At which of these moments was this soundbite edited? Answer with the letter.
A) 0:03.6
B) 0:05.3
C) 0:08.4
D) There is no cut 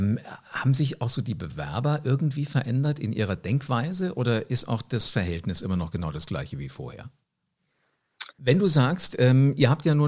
C